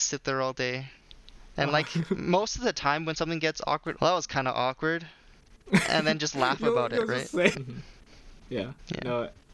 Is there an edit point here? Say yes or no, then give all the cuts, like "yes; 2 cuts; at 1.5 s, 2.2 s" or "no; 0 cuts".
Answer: yes; 2 cuts; at 4.0 s, 7.5 s